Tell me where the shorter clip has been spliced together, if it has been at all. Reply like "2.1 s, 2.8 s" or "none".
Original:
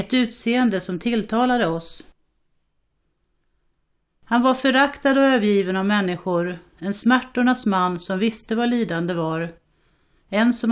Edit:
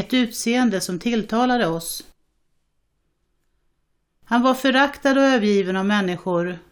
none